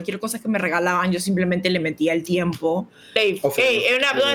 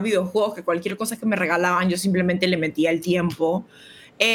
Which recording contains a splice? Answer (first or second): first